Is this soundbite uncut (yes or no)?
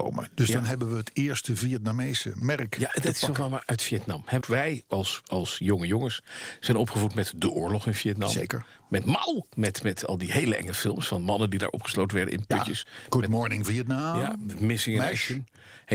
no